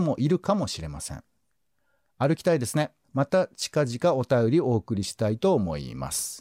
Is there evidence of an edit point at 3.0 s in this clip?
yes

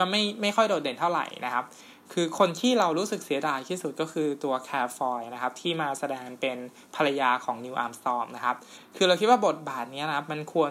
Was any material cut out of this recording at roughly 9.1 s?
no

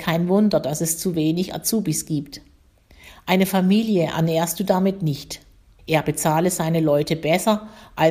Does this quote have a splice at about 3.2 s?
no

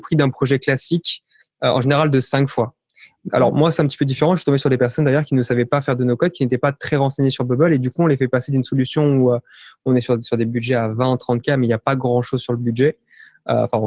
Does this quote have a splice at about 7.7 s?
no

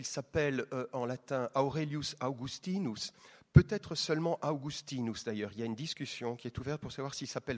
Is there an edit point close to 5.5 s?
no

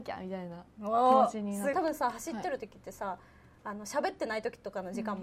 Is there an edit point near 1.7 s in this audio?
yes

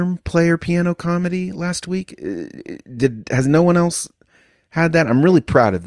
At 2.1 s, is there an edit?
no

